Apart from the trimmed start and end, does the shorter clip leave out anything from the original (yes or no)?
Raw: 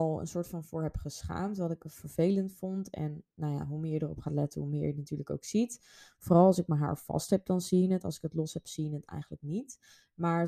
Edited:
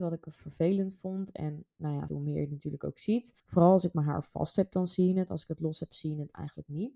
yes